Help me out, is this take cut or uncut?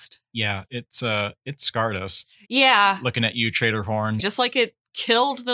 cut